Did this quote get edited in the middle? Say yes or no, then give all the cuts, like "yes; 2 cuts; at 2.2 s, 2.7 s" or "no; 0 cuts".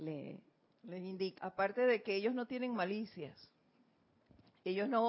yes; 1 cut; at 1.4 s